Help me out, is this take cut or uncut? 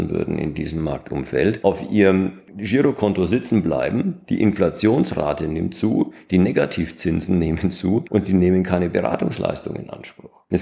uncut